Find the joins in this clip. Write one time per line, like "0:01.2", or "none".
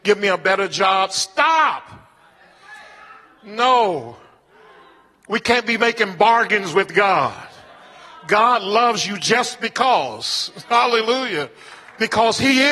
none